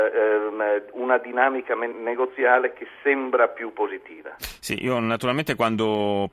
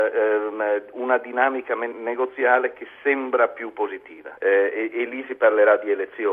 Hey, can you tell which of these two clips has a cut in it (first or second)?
second